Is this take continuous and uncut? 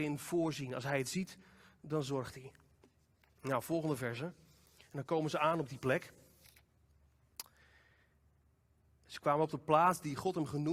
yes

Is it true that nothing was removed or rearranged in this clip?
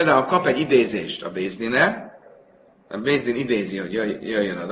yes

